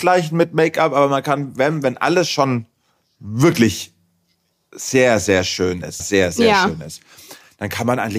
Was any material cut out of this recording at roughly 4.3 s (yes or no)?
no